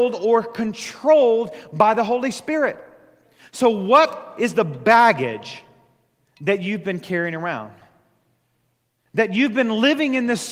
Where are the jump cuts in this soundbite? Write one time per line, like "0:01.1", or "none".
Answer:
none